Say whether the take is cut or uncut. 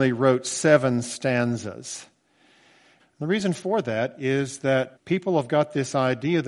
cut